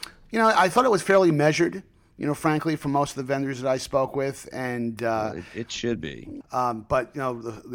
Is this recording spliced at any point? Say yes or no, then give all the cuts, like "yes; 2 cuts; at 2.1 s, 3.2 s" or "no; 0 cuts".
yes; 1 cut; at 6.4 s